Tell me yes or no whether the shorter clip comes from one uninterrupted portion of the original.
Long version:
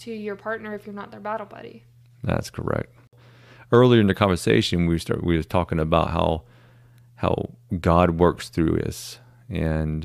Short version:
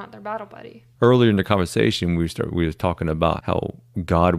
no